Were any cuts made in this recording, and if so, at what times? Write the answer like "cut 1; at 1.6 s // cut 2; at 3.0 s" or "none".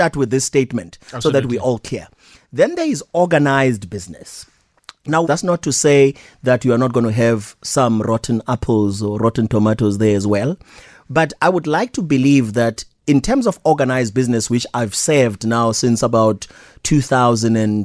cut 1; at 5.2 s